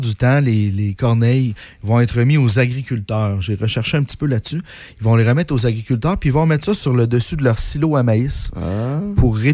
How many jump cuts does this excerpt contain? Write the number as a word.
zero